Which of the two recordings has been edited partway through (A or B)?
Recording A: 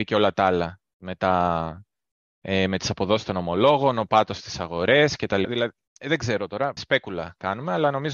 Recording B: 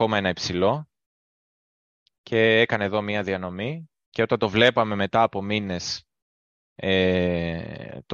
A